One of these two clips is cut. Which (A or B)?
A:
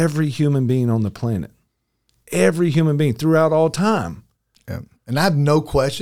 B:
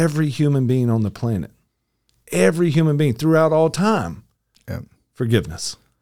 A